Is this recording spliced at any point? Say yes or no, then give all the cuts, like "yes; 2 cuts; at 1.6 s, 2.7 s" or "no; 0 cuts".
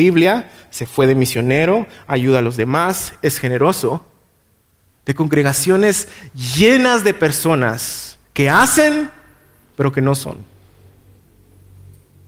yes; 1 cut; at 4.9 s